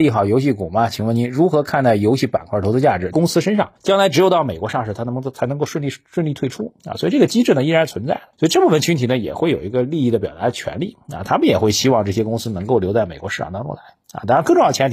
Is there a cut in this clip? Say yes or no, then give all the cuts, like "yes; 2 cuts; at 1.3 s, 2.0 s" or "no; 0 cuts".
yes; 1 cut; at 3.1 s